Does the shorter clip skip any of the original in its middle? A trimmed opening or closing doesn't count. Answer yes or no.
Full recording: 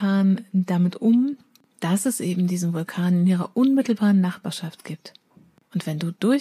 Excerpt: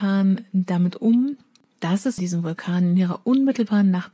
yes